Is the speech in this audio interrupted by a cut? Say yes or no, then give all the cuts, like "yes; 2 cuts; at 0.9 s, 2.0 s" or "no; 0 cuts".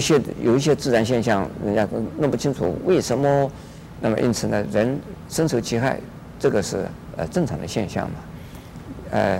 yes; 1 cut; at 3.9 s